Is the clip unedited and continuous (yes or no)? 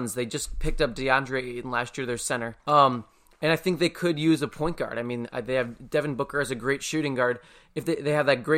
no